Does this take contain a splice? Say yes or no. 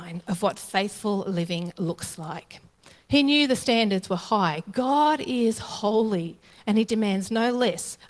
no